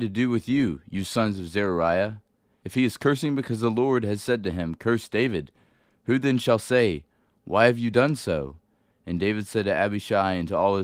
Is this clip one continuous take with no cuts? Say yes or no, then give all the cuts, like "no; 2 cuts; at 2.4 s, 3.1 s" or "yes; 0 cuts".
yes; 0 cuts